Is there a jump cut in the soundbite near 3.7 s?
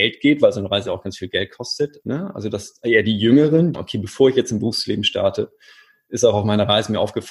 yes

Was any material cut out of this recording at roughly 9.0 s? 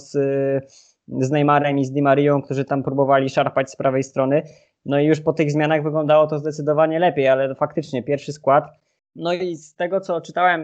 yes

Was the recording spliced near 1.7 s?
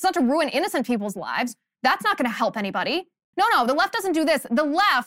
no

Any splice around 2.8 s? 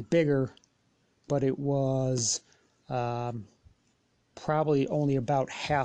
no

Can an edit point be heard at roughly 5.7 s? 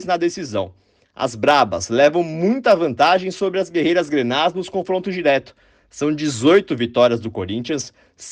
no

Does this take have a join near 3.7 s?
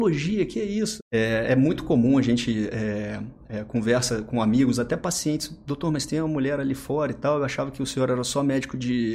no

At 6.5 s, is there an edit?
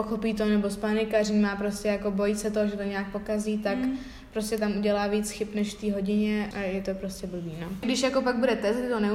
yes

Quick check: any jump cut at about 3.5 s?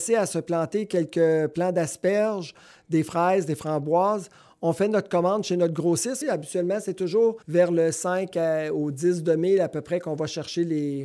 no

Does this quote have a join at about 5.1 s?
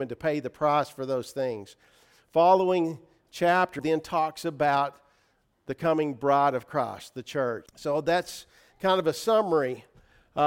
no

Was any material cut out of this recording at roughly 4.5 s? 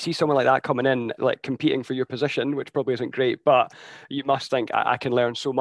yes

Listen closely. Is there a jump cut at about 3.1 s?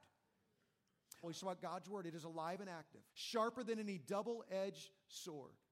yes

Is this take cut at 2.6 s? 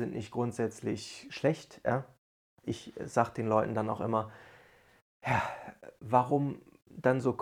yes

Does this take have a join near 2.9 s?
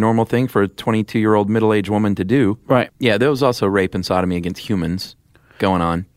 yes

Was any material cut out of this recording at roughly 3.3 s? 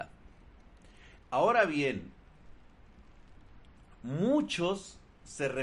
no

